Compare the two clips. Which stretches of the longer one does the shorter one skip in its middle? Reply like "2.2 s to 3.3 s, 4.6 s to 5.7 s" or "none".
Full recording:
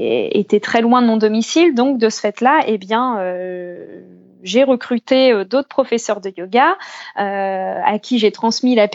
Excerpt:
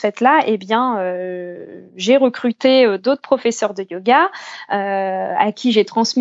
4.1 s to 4.3 s